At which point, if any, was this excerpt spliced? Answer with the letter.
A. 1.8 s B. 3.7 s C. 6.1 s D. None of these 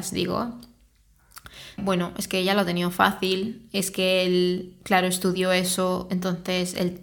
A